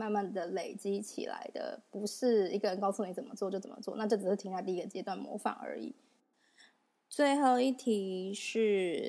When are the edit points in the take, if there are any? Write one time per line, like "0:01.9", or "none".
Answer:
none